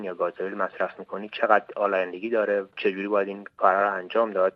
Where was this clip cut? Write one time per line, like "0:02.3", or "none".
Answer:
none